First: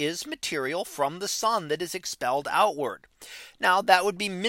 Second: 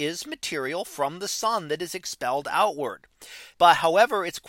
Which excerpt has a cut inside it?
second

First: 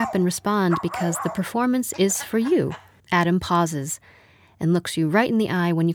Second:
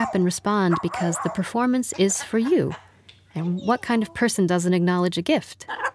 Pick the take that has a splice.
first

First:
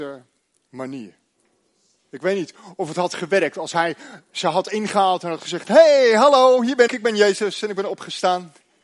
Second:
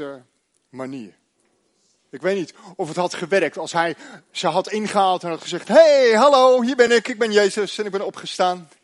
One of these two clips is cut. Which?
first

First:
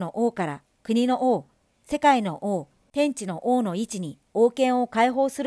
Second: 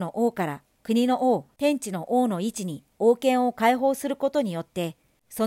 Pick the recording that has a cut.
second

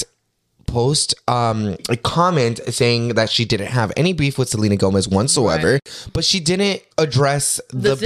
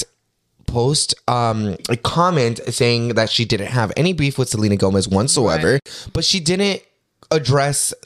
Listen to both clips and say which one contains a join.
first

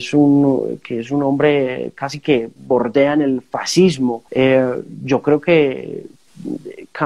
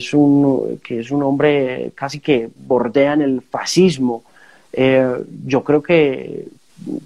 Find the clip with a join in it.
first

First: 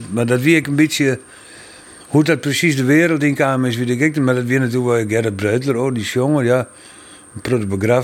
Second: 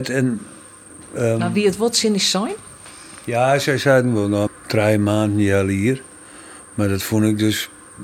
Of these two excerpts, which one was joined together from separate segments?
second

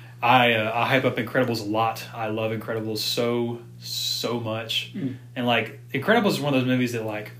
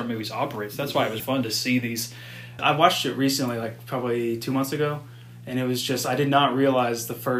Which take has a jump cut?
second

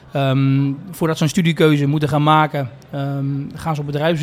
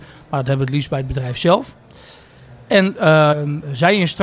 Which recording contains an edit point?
second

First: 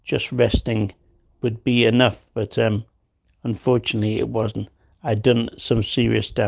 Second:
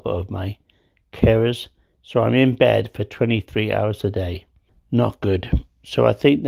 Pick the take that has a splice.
second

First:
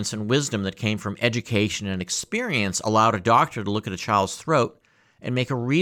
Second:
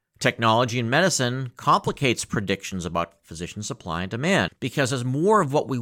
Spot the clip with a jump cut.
second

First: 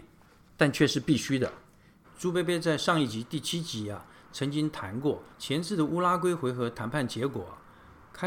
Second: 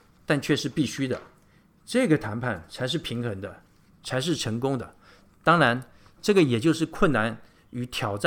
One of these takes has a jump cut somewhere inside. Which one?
first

